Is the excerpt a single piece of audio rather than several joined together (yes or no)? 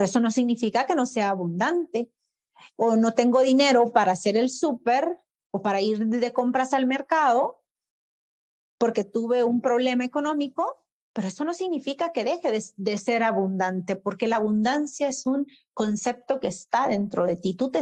yes